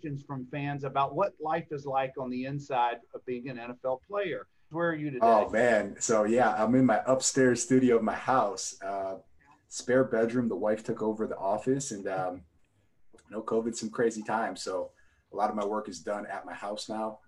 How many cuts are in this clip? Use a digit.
1